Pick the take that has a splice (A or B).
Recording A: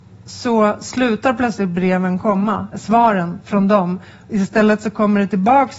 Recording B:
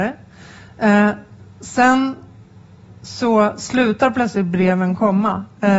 A